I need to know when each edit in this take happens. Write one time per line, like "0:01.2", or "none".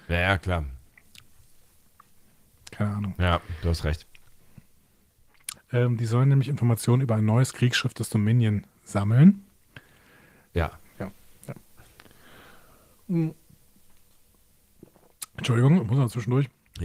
0:05.5
0:10.5